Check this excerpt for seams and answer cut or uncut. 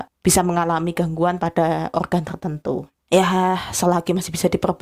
uncut